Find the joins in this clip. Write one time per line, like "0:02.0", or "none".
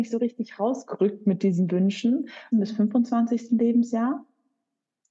0:02.5